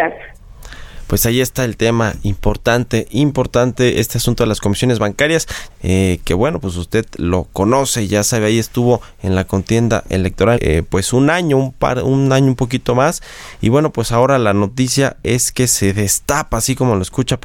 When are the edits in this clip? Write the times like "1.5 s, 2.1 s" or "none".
5.7 s, 10.6 s

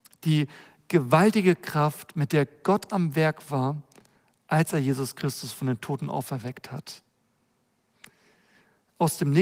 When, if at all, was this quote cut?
none

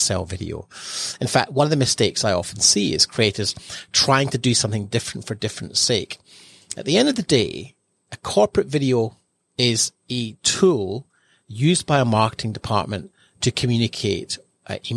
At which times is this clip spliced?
none

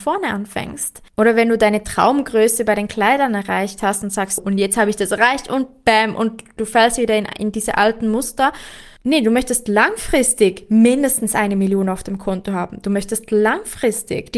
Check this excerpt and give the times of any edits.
4.4 s

